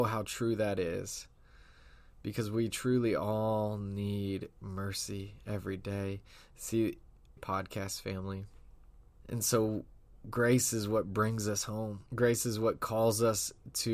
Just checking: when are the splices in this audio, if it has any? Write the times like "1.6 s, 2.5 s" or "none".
7.4 s, 9.2 s, 12.1 s